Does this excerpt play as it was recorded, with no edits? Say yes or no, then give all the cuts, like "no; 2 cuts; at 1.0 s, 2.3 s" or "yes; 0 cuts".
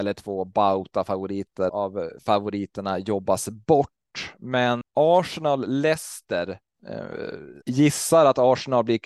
no; 3 cuts; at 1.7 s, 4.8 s, 7.6 s